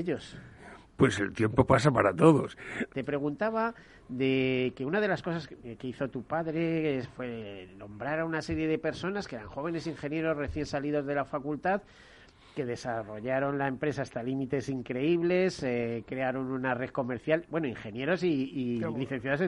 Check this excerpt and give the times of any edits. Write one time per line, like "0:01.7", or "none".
0:02.9